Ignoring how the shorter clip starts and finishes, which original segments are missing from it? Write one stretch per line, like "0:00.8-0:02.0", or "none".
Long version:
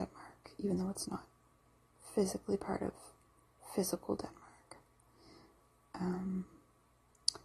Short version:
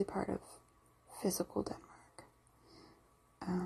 none